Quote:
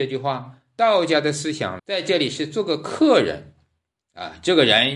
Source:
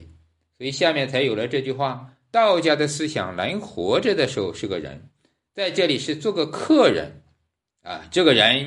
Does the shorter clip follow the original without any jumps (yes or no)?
no